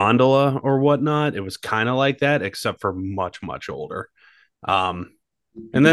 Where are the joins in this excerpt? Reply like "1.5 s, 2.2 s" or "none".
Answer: none